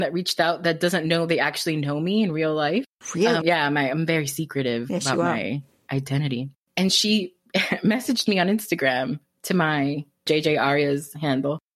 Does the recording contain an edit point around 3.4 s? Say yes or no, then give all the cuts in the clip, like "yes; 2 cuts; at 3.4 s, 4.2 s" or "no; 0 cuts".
yes; 1 cut; at 3.4 s